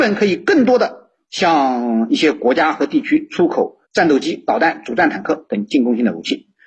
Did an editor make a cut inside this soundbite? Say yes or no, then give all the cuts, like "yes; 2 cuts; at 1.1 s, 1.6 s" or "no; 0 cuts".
yes; 1 cut; at 3.8 s